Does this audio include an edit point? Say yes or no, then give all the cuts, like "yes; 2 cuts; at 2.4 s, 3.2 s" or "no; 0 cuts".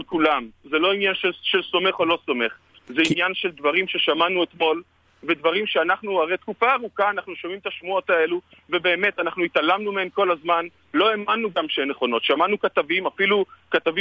no; 0 cuts